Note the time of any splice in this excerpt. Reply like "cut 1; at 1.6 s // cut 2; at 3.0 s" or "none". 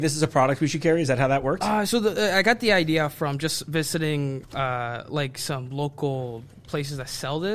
none